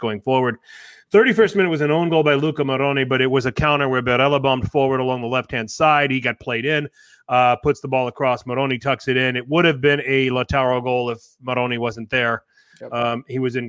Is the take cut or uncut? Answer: uncut